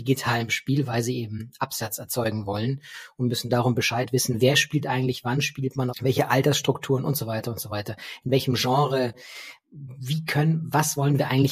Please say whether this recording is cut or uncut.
cut